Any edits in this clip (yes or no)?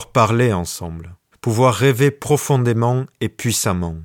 yes